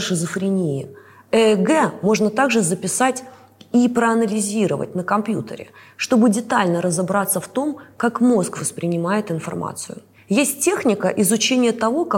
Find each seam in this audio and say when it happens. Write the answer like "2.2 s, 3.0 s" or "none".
none